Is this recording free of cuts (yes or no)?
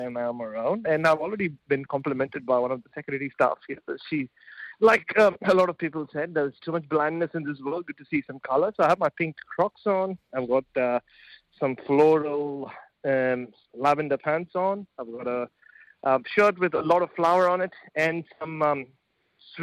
yes